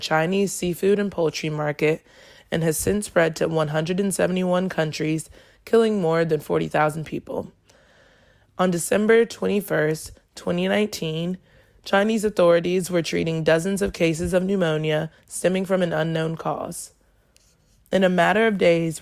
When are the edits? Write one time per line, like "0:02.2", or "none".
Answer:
none